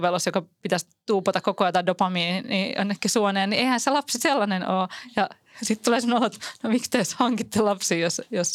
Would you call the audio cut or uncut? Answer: uncut